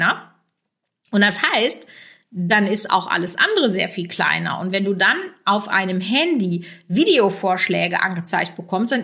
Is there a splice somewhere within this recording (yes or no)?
no